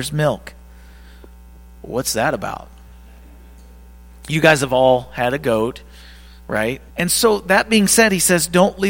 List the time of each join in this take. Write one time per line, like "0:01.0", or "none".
0:06.9

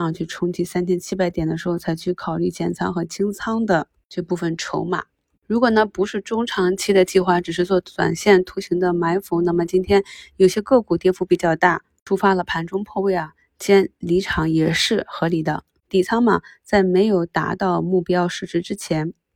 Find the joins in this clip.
0:05.3
0:15.8

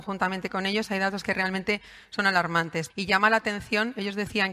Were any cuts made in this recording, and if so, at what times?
0:02.9

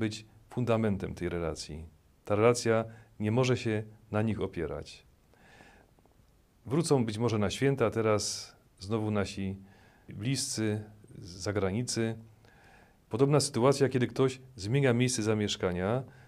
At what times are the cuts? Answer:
0:13.0

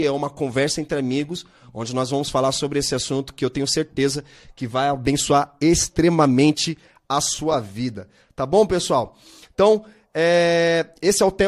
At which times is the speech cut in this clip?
none

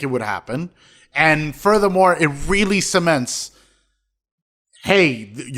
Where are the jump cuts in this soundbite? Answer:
none

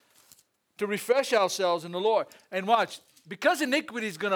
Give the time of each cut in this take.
none

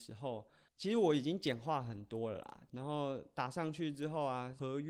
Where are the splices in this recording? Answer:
0:02.7

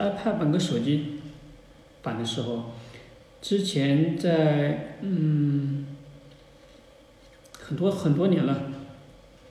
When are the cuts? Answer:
none

